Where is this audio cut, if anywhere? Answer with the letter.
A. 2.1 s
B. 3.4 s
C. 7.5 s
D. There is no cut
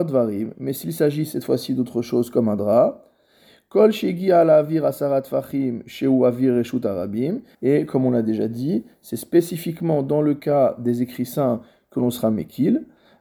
C